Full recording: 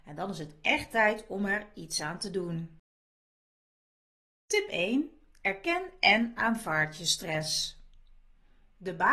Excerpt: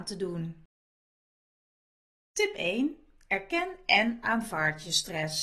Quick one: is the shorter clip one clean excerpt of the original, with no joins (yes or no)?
yes